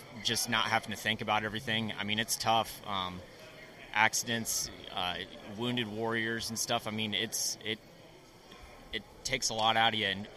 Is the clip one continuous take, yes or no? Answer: yes